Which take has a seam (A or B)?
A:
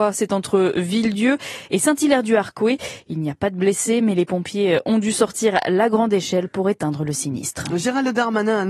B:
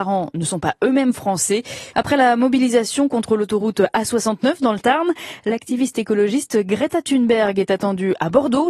B